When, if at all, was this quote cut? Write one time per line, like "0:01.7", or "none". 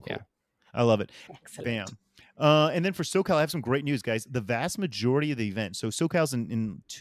0:01.3

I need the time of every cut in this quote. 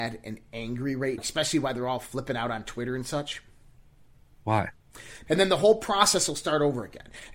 0:01.2
0:05.3

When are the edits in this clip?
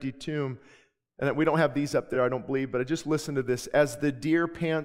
none

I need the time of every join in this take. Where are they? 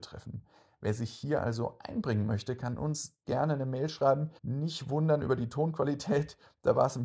0:03.2
0:04.4

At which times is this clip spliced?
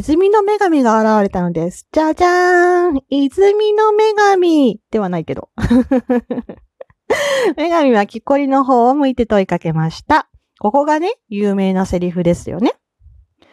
none

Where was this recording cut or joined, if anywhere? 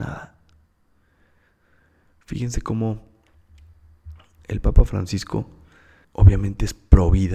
0:04.4
0:06.0

